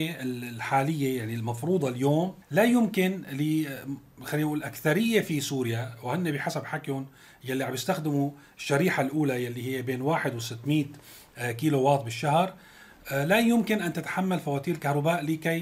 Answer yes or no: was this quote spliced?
yes